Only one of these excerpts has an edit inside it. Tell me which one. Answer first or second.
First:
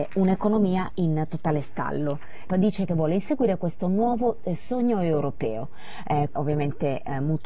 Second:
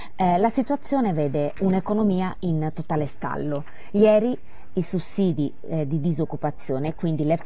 first